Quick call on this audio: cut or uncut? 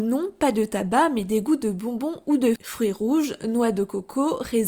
cut